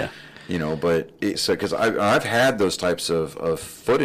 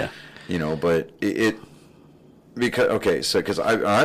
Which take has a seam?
first; 1 cut; at 1.3 s

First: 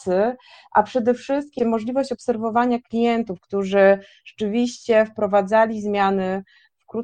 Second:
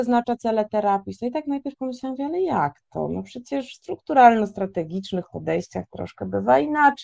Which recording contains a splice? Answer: first; 1 cut; at 1.6 s

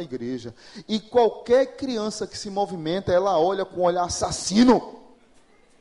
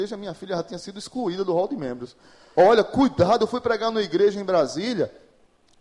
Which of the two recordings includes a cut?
second; 1 cut; at 2.5 s

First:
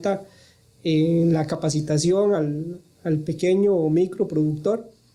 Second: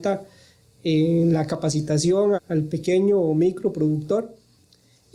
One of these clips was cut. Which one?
second; 1 cut; at 2.3 s

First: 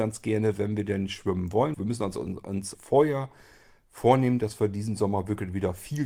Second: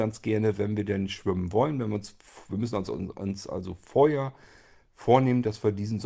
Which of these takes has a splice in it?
first; 2 cuts; at 1.7 s, 2.7 s

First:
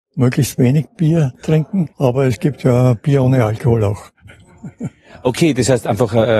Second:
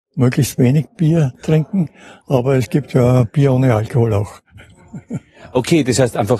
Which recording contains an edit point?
first; 1 cut; at 1.9 s

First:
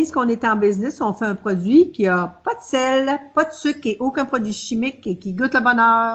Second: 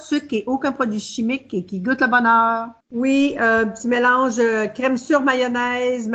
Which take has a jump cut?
second; 1 cut; at 2.8 s

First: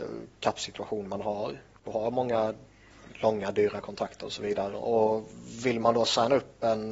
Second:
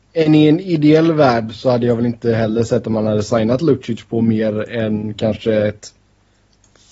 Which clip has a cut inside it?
first; 1 cut; at 4.7 s

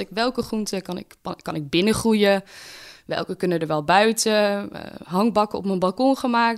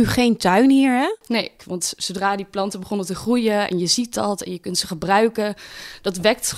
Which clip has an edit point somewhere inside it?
second; 1 cut; at 1.6 s

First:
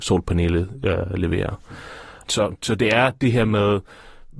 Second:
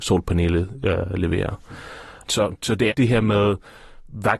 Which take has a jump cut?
second; 1 cut; at 2.9 s

